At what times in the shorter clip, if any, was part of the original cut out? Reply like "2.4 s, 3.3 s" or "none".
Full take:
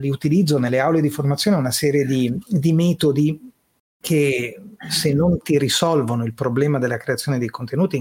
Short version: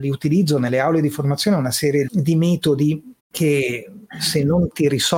2.1 s, 3.2 s